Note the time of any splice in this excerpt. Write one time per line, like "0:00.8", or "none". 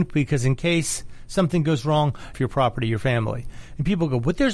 0:02.3